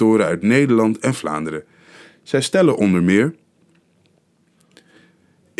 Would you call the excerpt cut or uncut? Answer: uncut